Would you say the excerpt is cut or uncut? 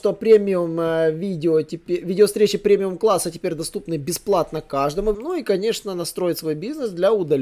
cut